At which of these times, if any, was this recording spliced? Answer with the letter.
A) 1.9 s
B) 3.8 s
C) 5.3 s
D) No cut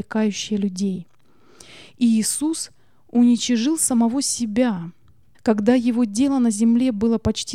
C